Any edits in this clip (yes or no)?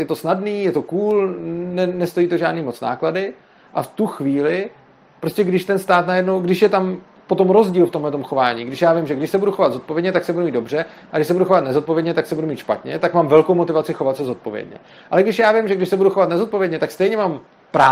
no